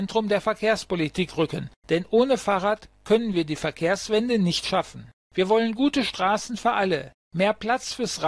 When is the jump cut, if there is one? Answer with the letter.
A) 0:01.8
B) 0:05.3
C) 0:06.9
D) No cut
D